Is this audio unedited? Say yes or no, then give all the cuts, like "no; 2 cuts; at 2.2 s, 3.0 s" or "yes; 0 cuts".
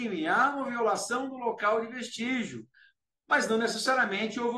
yes; 0 cuts